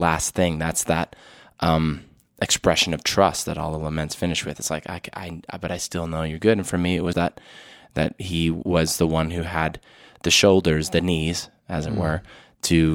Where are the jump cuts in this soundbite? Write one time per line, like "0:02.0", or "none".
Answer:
0:07.1